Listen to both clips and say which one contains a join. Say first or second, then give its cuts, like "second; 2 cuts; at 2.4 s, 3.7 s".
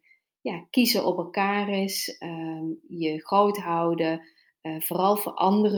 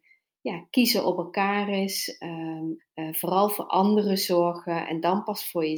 second; 1 cut; at 2.8 s